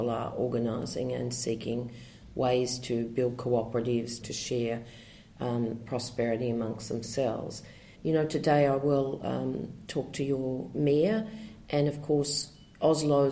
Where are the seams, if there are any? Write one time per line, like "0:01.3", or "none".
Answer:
0:04.2
0:07.9